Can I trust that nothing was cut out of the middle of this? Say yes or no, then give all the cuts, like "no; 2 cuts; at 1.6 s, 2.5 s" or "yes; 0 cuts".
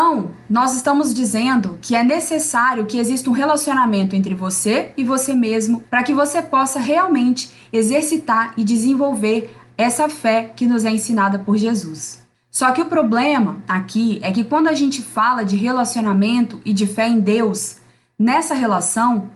no; 1 cut; at 5.8 s